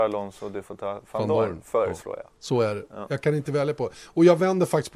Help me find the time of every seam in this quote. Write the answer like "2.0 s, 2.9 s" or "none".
none

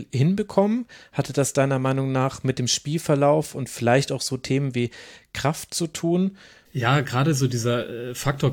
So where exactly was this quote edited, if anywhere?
6.6 s

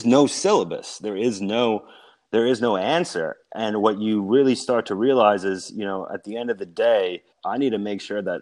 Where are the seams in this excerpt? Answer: 7.3 s

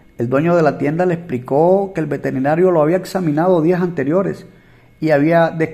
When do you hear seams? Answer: none

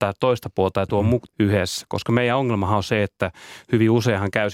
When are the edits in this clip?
1.3 s

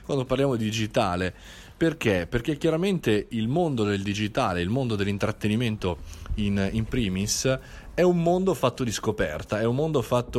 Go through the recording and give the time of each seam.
none

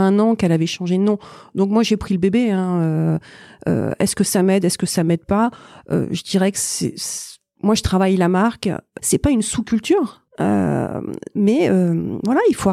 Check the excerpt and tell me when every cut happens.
9.0 s, 10.3 s

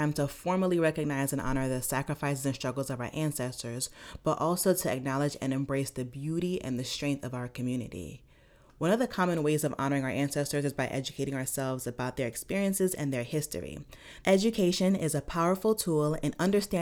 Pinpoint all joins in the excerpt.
14.2 s

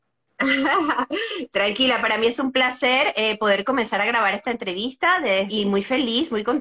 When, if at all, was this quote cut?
5.5 s

